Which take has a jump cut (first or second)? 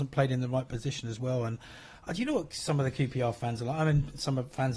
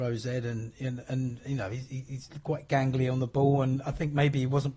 second